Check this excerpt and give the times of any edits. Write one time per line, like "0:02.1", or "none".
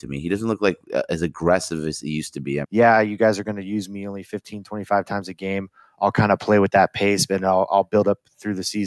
0:02.6